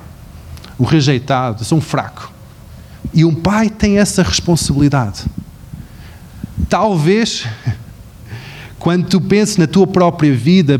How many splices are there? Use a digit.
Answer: 1